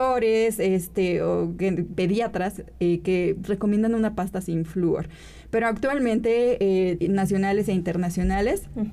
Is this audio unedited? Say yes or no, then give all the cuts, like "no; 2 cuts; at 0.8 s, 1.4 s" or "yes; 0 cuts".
no; 2 cuts; at 1.9 s, 7.0 s